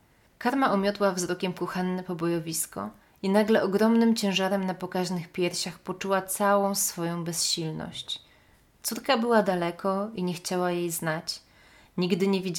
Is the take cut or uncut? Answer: uncut